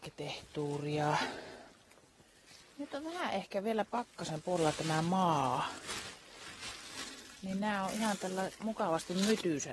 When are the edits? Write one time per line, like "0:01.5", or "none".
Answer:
none